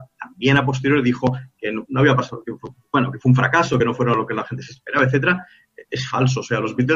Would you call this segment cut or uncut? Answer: uncut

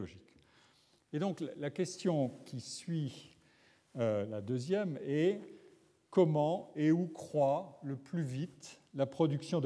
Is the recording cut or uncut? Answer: uncut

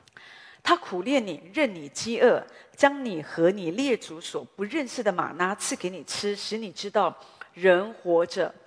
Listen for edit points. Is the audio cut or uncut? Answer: uncut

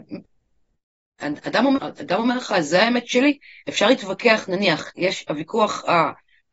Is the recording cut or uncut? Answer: uncut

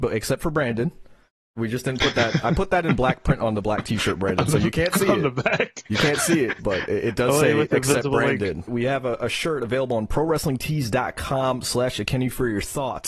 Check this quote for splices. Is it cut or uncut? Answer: cut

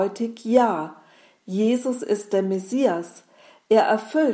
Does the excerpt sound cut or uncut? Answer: uncut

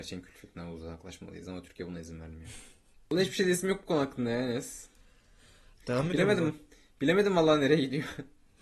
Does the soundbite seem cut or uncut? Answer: uncut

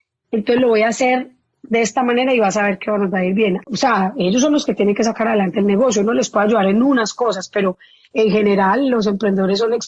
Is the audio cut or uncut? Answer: cut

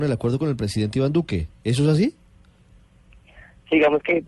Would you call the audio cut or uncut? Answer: uncut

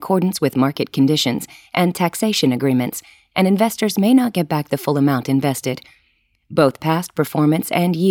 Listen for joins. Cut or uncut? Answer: uncut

